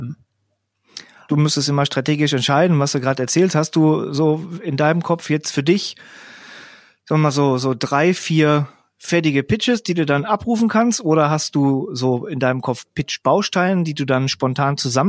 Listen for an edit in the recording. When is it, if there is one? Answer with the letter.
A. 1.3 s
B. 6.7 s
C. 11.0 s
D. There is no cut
A